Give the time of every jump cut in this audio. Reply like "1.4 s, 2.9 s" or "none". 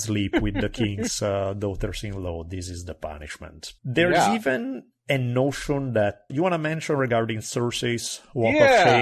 3.8 s, 6.3 s